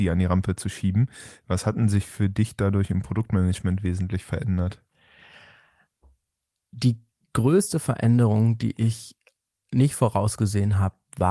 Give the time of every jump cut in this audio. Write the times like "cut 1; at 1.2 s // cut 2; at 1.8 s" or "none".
none

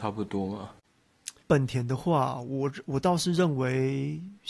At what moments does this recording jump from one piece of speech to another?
cut 1; at 1.4 s

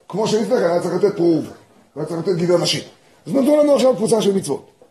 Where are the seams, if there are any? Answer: none

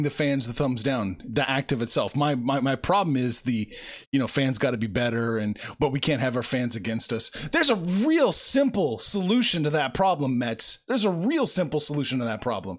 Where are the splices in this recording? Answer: none

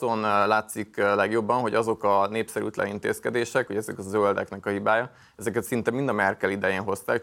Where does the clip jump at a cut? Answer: cut 1; at 3.7 s

